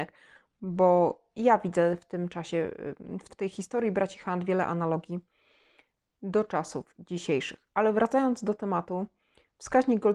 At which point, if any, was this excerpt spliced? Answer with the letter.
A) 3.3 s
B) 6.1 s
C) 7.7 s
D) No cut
A